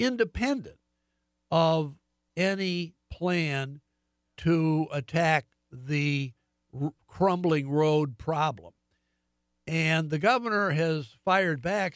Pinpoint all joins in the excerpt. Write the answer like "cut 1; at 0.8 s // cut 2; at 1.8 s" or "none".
none